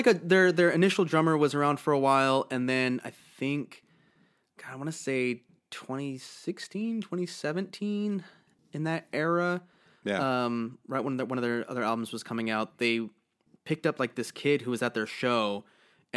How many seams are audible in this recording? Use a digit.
0